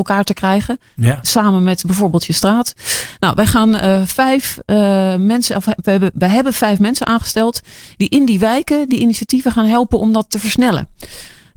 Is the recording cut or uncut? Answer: uncut